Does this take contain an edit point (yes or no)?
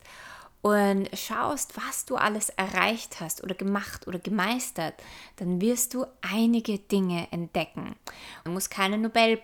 yes